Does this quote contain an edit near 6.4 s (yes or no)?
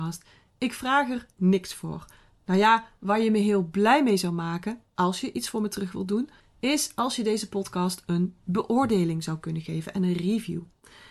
yes